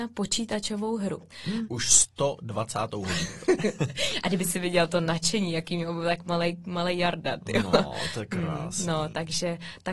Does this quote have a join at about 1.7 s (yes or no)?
yes